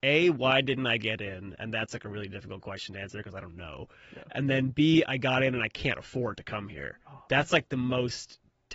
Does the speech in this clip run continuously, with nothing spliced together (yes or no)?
yes